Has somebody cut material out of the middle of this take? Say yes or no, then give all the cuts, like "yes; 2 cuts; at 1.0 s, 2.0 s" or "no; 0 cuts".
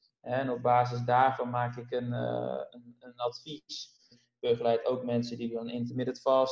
yes; 2 cuts; at 2.7 s, 4.1 s